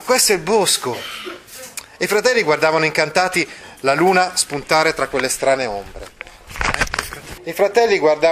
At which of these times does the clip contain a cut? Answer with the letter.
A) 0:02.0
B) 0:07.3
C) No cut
B